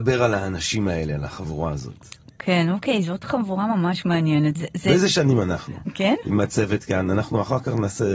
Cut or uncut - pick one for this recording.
cut